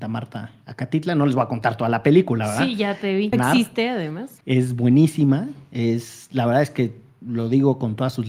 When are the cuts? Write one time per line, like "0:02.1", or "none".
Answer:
0:03.3
0:04.4